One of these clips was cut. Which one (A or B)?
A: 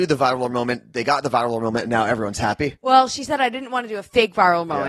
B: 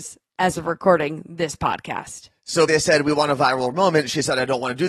B